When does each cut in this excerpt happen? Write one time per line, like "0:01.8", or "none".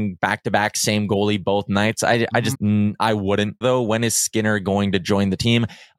0:02.5
0:03.6